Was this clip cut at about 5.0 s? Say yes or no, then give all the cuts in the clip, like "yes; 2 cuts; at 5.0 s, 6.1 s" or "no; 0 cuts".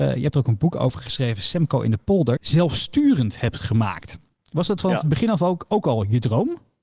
no; 1 cut; at 2.4 s